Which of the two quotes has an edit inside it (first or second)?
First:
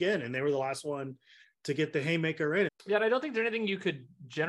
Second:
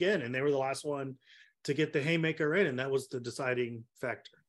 first